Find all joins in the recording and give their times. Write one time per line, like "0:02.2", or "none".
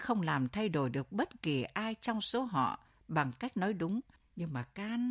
0:04.2